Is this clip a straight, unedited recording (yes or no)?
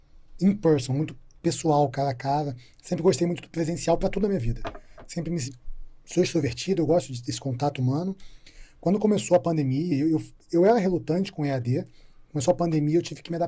yes